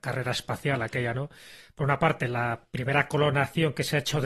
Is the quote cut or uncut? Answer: cut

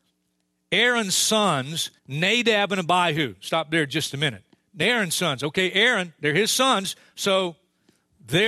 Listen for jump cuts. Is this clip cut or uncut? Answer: cut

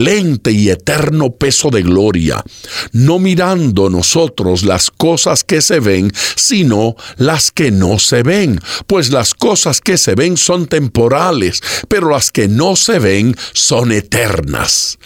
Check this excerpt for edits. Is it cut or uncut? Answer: uncut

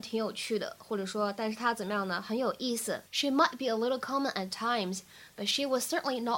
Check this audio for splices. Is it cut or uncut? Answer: cut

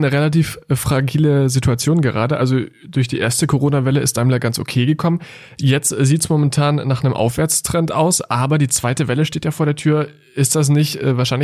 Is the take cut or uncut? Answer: uncut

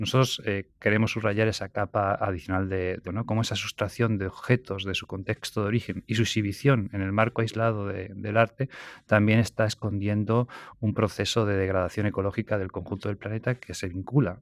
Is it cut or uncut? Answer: cut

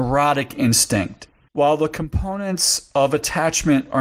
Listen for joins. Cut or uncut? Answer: cut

